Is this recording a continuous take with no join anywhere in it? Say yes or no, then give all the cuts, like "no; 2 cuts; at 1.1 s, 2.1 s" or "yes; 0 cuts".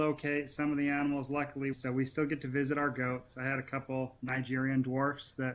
no; 1 cut; at 1.7 s